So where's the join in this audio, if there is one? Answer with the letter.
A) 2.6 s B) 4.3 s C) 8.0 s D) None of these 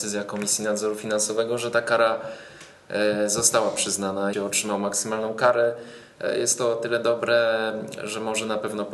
B